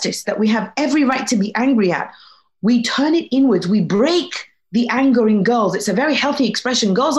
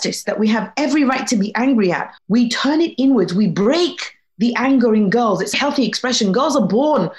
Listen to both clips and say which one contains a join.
second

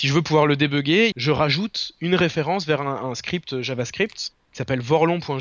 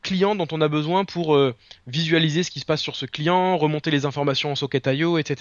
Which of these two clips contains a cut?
first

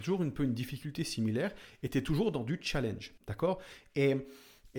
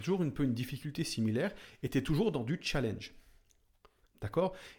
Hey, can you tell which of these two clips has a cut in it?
first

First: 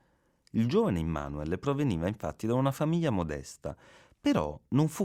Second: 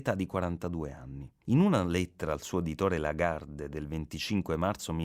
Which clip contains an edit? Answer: second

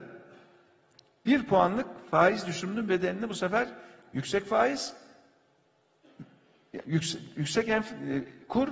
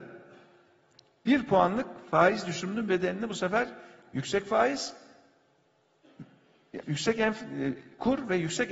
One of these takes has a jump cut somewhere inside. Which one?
second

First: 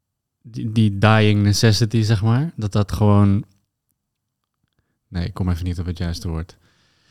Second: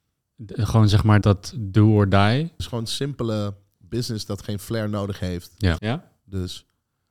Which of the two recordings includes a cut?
second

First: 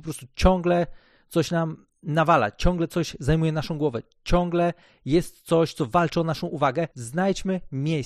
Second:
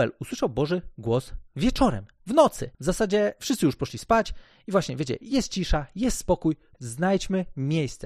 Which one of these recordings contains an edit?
second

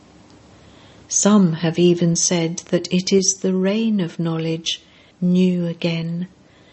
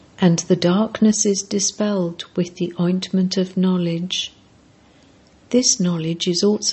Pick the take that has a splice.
first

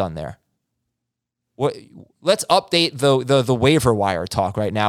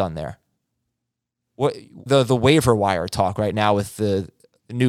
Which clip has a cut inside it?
second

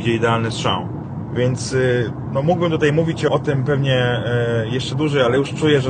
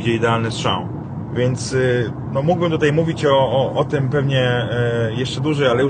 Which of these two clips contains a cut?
first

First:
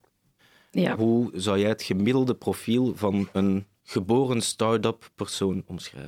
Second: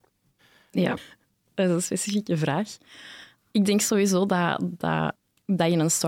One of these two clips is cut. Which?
second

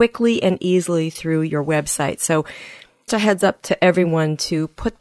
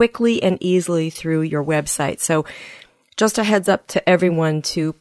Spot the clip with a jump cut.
first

